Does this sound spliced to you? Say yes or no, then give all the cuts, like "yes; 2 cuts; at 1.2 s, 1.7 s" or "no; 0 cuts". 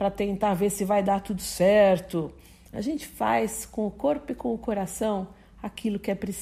yes; 1 cut; at 2.7 s